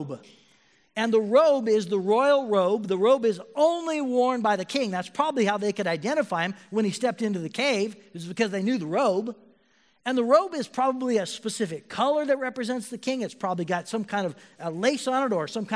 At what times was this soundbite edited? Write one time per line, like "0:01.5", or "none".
none